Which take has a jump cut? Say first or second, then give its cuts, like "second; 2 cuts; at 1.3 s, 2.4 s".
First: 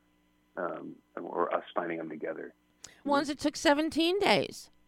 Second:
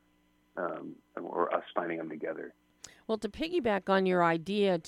first; 1 cut; at 3.1 s